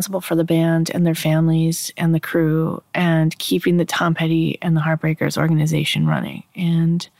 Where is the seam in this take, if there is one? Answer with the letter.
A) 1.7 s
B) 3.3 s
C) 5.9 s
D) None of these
D